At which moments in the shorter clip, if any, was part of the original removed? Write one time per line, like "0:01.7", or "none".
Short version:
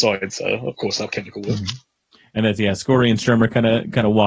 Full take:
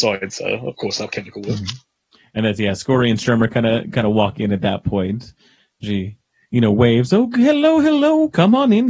none